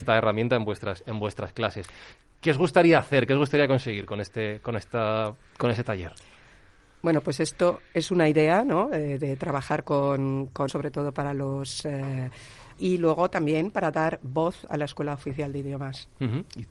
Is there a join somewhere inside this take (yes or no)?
yes